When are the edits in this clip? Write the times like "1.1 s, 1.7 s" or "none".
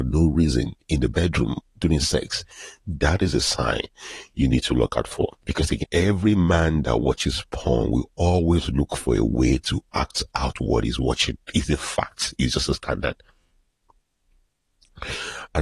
5.8 s